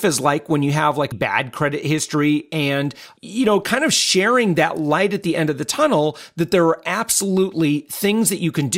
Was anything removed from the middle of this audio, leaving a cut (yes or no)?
yes